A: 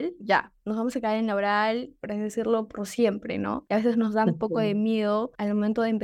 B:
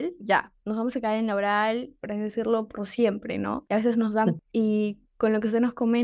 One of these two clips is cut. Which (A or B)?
B